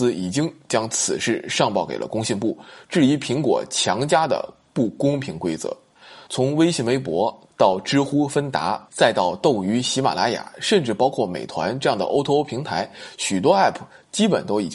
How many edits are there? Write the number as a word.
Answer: one